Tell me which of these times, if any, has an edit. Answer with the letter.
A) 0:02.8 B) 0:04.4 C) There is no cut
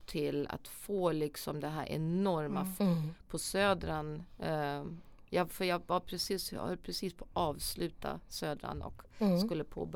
A